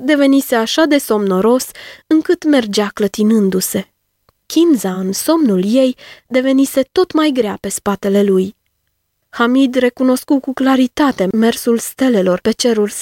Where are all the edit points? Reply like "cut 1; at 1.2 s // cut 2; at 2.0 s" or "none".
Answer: none